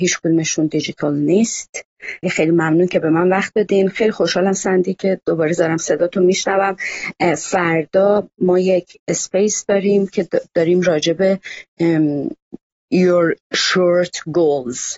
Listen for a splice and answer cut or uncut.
cut